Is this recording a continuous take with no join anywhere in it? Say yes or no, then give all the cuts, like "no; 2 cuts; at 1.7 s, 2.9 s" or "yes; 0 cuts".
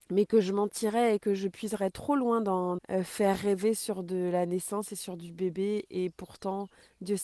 no; 1 cut; at 2.8 s